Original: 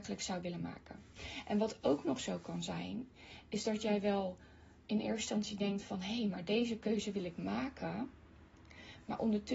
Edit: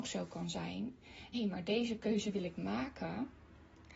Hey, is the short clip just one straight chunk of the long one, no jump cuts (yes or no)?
no